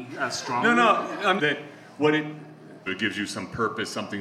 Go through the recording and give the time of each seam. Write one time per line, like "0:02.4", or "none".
0:01.4
0:02.9